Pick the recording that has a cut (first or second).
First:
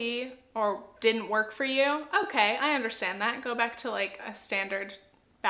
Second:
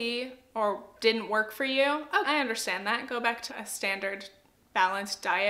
second